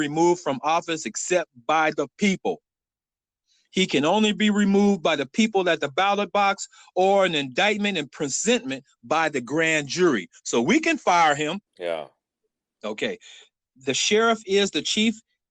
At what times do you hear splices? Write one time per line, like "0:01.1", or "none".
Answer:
0:11.7